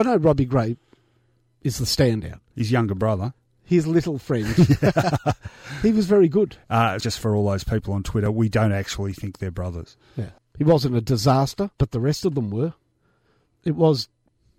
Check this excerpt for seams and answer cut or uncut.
cut